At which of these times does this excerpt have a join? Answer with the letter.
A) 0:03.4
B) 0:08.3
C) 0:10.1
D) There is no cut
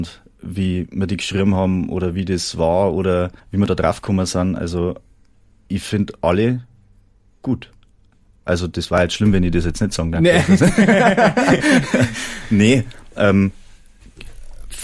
A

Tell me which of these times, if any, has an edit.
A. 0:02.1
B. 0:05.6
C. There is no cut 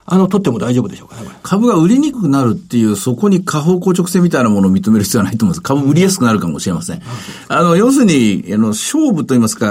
A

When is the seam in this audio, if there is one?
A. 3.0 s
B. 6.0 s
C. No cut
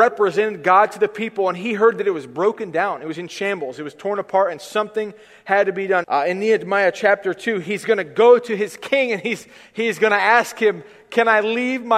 B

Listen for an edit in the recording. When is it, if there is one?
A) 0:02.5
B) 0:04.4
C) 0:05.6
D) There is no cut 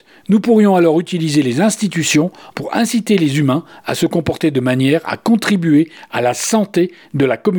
A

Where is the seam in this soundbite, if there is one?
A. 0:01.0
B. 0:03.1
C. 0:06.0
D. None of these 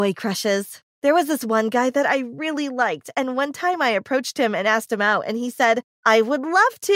D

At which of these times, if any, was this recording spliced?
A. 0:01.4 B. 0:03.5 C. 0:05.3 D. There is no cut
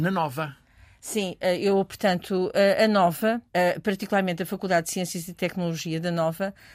B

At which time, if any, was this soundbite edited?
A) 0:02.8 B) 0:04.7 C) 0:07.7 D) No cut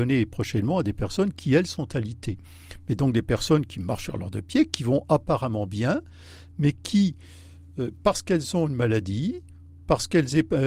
D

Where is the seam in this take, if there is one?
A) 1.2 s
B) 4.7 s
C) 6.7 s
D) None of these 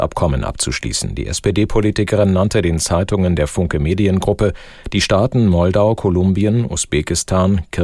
D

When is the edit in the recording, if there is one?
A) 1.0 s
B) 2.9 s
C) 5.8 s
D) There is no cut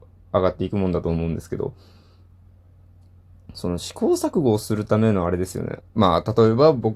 C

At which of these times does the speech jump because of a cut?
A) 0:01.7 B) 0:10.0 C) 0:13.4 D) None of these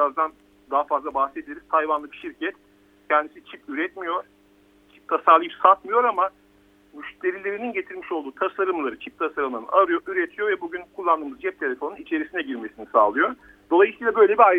B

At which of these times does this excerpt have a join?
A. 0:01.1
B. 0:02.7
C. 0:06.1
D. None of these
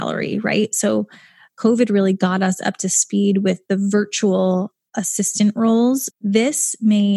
C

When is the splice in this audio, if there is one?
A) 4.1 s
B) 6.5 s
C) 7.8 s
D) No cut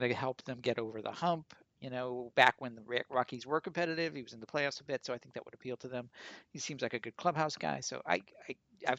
D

